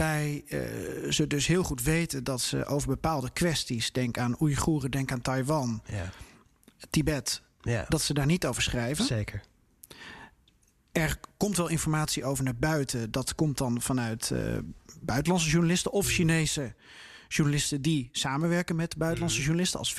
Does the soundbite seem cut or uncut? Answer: uncut